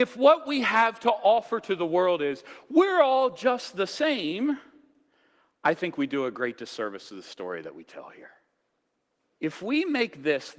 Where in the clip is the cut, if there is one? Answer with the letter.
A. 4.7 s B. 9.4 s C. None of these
B